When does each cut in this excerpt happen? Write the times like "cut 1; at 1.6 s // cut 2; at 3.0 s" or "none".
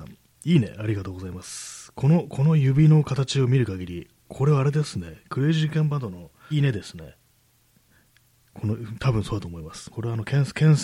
cut 1; at 6.5 s // cut 2; at 9.9 s